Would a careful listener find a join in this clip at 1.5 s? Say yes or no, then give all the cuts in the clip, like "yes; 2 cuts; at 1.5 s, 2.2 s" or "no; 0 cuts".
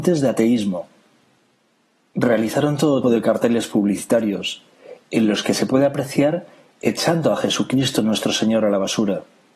no; 1 cut; at 3.0 s